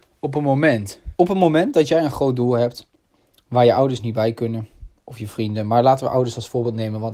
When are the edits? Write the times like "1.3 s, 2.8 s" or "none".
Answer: 1.2 s